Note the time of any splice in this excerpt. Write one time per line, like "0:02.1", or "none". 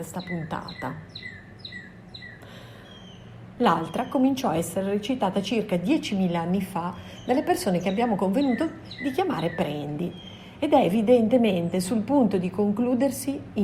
0:03.6